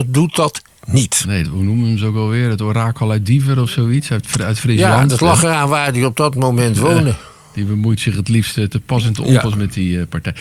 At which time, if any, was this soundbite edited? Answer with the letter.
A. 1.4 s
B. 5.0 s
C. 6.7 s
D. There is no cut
A